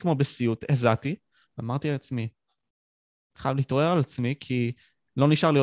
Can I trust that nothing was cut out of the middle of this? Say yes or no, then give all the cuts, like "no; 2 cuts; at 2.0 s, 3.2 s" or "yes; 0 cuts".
yes; 0 cuts